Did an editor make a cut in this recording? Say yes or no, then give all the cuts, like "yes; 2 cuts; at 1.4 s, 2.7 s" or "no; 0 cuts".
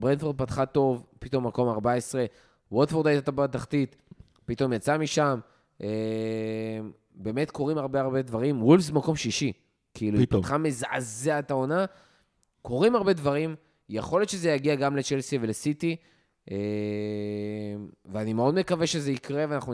no; 0 cuts